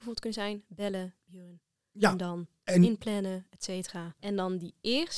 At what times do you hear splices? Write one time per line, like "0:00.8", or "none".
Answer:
0:04.2